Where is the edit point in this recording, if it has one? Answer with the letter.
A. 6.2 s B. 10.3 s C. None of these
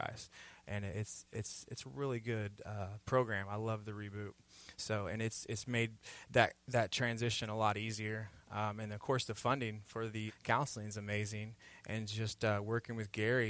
B